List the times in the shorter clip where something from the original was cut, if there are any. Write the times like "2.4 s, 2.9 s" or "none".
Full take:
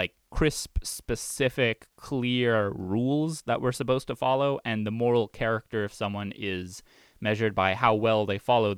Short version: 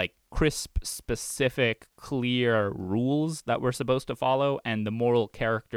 none